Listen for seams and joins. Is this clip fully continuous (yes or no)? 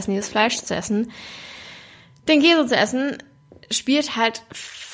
yes